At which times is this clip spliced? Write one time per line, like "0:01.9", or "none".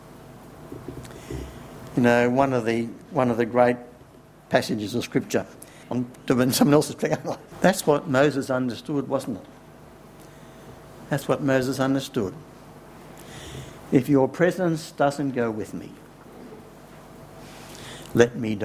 0:05.8
0:07.5